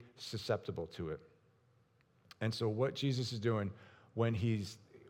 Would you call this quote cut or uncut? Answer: uncut